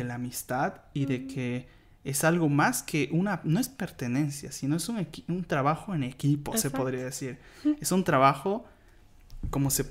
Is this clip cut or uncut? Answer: uncut